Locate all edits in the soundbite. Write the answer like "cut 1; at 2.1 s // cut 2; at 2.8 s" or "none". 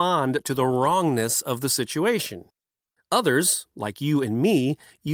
cut 1; at 3.0 s